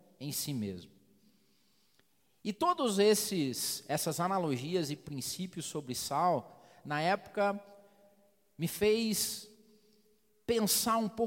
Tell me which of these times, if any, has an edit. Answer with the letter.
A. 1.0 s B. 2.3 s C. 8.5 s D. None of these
D